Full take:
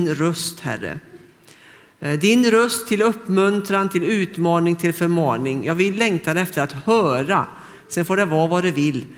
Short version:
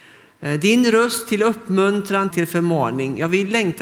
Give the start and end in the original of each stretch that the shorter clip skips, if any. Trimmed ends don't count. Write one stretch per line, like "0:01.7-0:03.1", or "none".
0:03.9-0:04.8